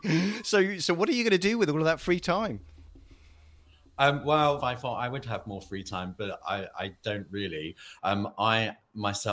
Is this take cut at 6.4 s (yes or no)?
no